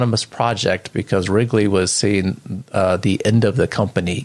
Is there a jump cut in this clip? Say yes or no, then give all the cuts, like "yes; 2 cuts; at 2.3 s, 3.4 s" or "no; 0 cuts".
no; 0 cuts